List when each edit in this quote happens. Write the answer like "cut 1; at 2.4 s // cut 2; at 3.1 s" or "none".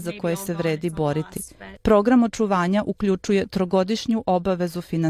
cut 1; at 1.8 s

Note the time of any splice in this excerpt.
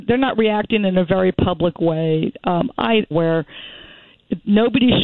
cut 1; at 3.1 s

